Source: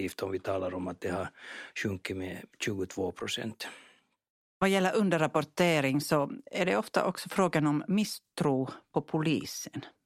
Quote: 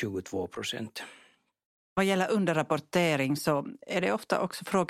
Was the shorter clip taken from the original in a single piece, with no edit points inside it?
yes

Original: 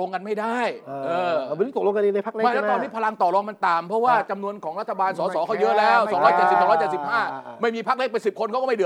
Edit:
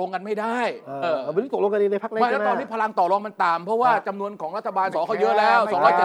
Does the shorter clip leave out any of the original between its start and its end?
yes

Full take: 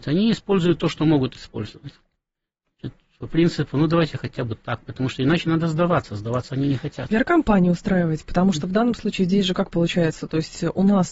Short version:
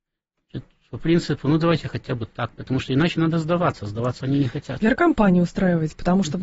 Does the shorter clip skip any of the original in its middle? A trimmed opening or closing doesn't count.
no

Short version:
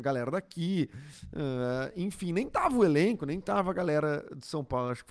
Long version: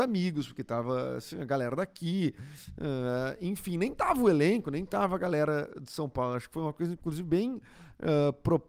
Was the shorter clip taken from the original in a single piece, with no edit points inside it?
yes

